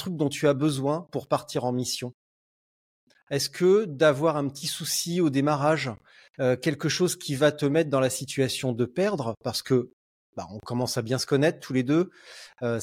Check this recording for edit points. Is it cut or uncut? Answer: uncut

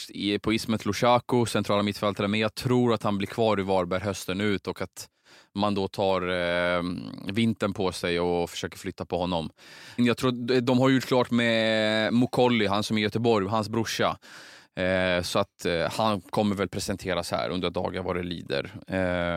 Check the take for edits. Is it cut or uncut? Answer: cut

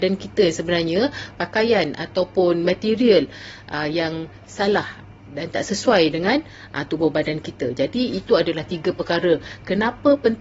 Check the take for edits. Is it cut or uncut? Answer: cut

